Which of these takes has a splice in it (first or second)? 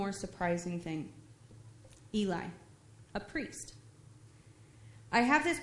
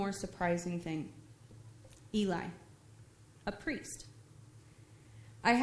first